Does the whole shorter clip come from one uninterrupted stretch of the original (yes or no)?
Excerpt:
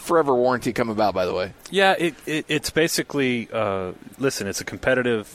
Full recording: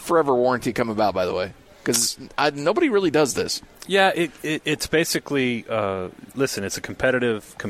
no